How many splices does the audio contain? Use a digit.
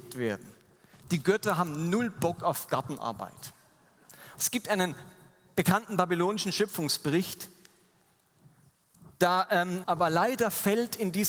2